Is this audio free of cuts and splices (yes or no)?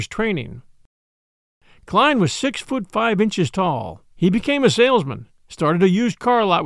no